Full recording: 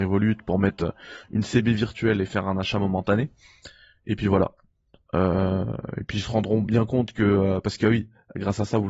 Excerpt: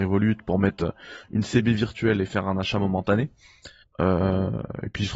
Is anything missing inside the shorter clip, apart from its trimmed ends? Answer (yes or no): yes